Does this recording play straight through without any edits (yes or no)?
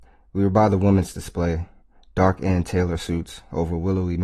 yes